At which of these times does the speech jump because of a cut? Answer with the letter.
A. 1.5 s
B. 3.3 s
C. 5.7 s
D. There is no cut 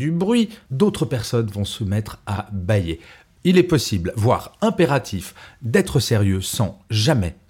B